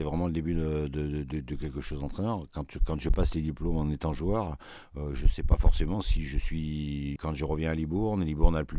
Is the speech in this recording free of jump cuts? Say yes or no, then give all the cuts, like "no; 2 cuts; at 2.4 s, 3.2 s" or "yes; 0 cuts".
no; 1 cut; at 7.2 s